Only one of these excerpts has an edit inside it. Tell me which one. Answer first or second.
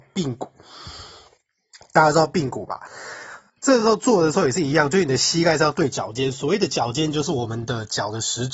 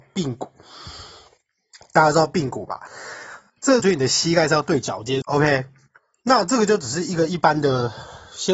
second